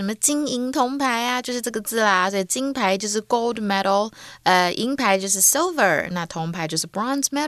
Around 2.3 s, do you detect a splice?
no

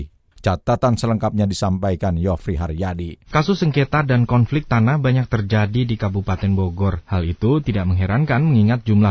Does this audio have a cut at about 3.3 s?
yes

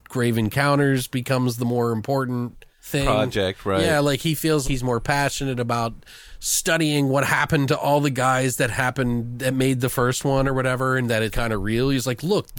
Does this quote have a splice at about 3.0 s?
no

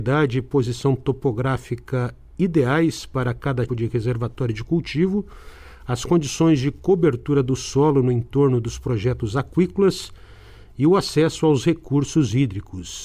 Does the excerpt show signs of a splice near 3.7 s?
yes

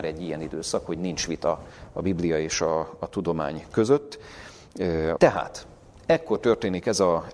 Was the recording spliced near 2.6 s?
no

